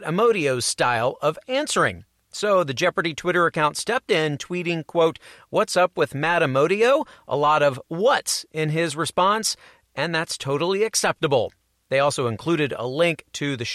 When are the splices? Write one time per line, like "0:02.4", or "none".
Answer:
0:02.2